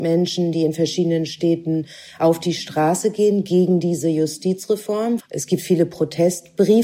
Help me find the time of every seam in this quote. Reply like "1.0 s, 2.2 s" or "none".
5.2 s